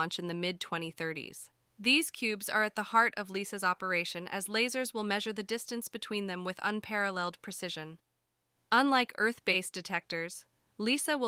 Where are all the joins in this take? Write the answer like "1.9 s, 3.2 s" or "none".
1.6 s, 8.5 s